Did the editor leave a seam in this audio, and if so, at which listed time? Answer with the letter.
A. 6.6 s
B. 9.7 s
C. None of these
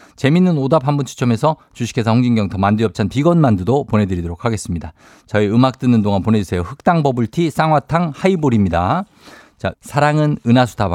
B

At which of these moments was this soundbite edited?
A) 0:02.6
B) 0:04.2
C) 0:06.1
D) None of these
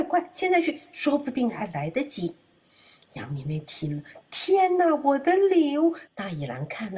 C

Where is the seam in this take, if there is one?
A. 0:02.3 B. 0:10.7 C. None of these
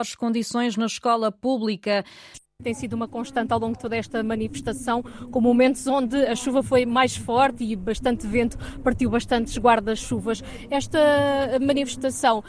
A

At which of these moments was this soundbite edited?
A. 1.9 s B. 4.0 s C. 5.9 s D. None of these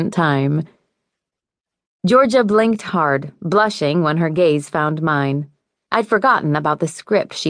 C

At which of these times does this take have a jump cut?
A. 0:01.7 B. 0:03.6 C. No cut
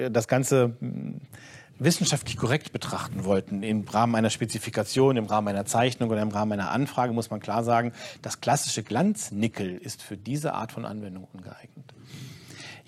A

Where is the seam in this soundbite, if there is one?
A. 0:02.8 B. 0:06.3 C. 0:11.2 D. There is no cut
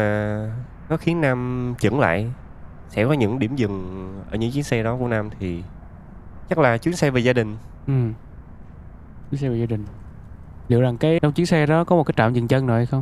C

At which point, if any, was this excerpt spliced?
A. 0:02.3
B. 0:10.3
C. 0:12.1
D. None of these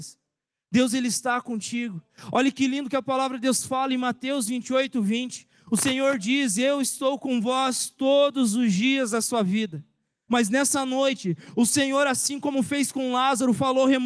B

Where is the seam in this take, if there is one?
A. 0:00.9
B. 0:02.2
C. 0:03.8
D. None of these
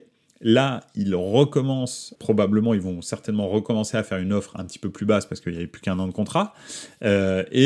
B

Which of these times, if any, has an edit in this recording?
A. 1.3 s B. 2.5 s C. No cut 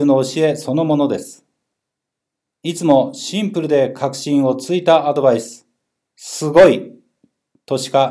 B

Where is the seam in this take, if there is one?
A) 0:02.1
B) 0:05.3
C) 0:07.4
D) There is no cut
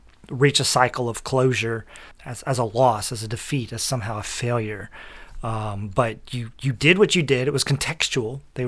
A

